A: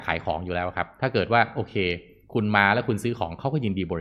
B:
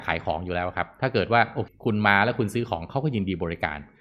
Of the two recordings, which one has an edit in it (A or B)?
B